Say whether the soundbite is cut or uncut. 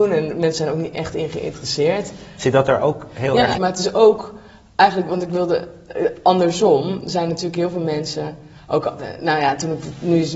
cut